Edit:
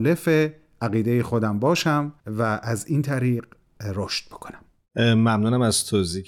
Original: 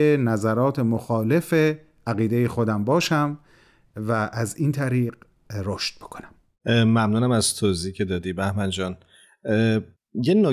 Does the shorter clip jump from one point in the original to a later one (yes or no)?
yes